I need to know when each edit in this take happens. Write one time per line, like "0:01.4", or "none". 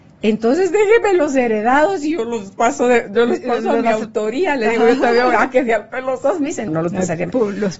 0:06.7